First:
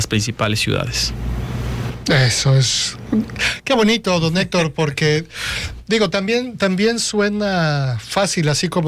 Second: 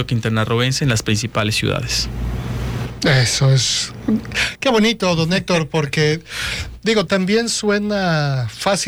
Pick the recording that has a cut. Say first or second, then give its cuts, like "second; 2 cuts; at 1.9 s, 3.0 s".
second; 1 cut; at 7.1 s